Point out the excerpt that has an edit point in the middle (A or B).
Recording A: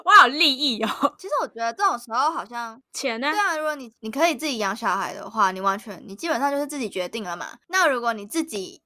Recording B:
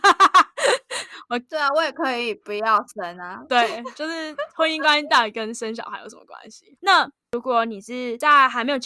B